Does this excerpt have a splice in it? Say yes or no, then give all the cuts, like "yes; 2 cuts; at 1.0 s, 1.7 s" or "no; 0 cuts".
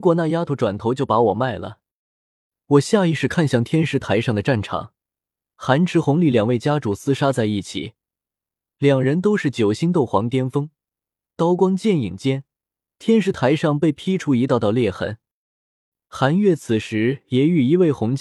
no; 0 cuts